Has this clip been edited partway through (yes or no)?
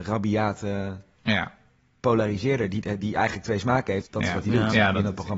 yes